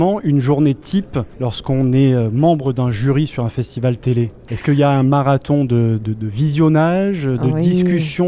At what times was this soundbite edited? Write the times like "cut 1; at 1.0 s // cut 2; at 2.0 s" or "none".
none

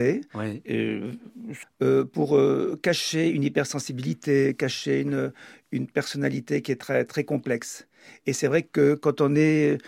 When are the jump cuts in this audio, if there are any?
cut 1; at 1.6 s

